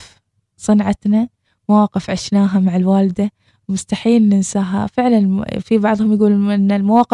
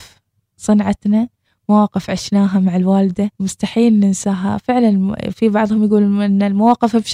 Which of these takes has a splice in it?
second; 1 cut; at 3.3 s

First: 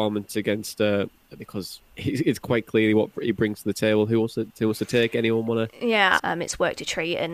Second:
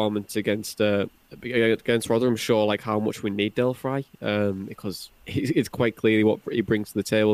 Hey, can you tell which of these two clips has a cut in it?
first; 2 cuts; at 1.4 s, 6.2 s

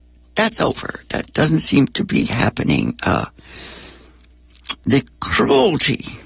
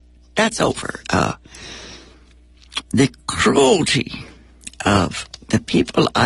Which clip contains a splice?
second; 1 cut; at 1.0 s

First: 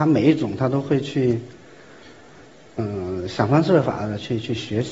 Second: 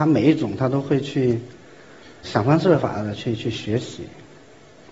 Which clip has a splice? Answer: second; 1 cut; at 2.2 s

